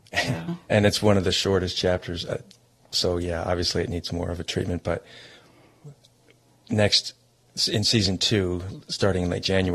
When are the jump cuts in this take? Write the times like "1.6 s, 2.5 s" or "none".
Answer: none

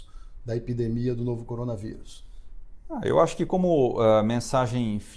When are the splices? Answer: none

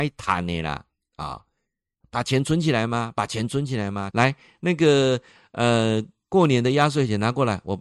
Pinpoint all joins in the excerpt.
2.0 s, 4.1 s

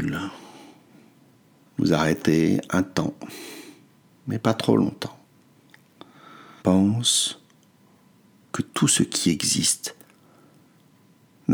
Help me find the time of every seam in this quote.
1.7 s, 6.6 s

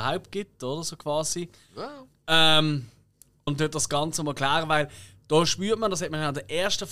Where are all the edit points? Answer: 3.5 s

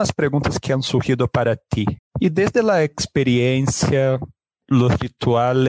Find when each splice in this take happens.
2.0 s

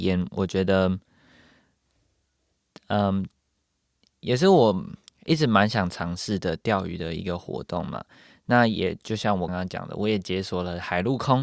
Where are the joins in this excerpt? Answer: 9.5 s

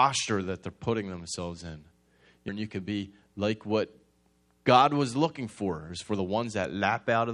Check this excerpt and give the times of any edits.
2.5 s

